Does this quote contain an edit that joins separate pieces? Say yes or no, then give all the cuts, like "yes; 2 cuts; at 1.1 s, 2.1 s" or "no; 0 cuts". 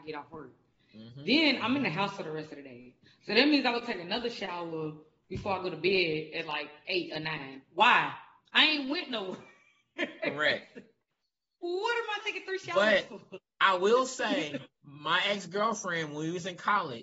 no; 0 cuts